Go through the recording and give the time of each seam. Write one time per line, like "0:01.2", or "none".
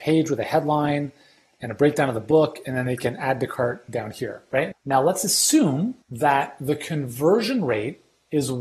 0:04.7
0:06.0